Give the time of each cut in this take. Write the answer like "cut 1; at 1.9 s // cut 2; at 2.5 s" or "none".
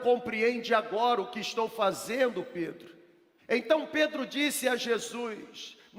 cut 1; at 3.4 s